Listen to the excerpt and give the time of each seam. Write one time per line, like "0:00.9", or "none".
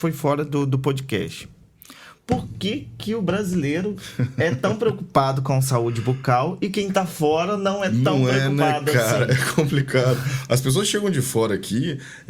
none